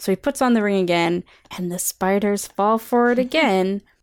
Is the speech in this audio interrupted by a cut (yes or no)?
yes